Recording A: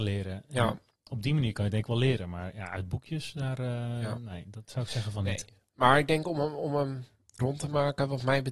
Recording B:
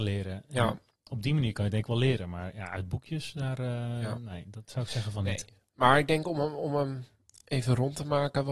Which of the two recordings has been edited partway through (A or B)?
A